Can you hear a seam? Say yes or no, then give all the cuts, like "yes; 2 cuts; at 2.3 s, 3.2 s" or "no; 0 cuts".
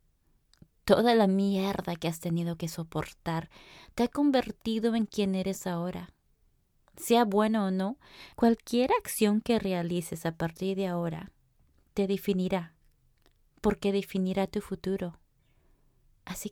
yes; 1 cut; at 8.3 s